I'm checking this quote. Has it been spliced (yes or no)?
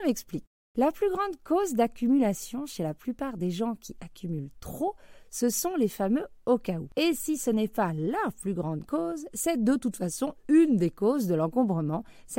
no